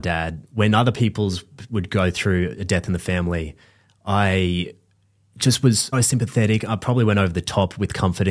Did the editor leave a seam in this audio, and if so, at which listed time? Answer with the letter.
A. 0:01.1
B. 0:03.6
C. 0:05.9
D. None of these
C